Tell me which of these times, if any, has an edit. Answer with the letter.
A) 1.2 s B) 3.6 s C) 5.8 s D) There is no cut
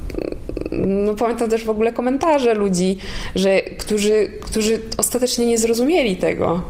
D